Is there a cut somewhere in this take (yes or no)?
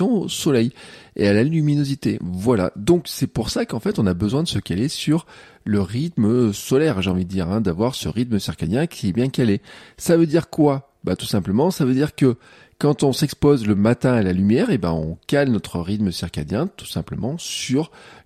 no